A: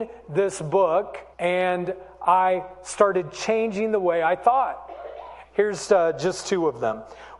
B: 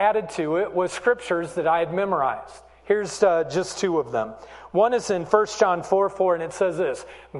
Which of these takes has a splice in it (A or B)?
A